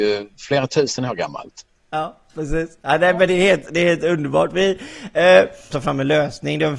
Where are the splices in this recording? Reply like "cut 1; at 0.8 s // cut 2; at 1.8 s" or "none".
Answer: cut 1; at 5.7 s